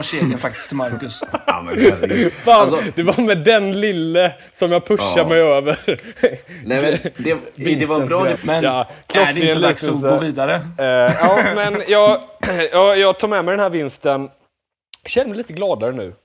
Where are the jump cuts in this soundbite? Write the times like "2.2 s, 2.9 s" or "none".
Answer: 8.4 s